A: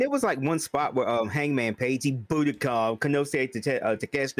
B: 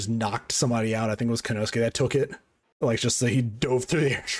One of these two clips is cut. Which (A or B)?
B